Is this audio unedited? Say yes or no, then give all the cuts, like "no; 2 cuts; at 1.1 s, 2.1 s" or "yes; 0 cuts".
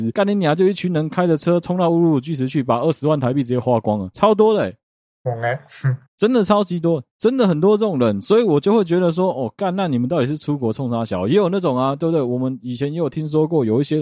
yes; 0 cuts